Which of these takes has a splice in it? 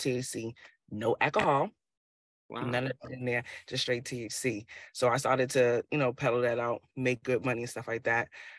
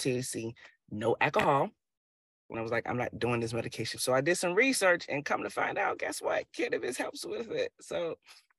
second; 2 cuts; at 2.5 s, 4.0 s

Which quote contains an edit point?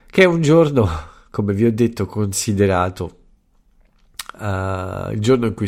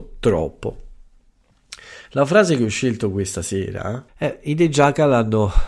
second; 1 cut; at 4.1 s

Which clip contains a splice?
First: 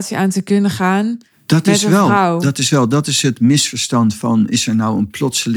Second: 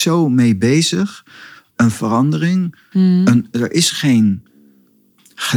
second; 1 cut; at 2.9 s

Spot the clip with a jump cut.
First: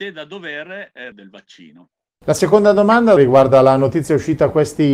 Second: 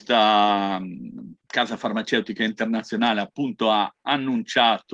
first; 2 cuts; at 1.1 s, 3.2 s

